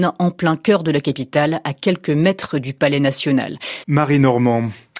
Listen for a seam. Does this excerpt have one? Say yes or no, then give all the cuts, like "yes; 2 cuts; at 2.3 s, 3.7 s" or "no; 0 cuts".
yes; 1 cut; at 3.8 s